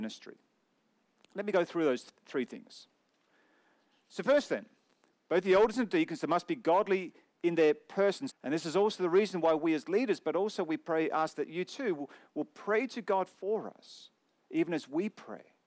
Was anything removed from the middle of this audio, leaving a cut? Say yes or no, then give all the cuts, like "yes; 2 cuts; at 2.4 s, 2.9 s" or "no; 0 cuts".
yes; 1 cut; at 8.3 s